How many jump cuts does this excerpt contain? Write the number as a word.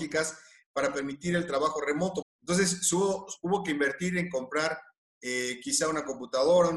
one